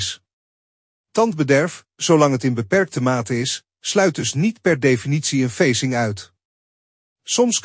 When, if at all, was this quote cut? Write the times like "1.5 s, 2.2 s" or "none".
none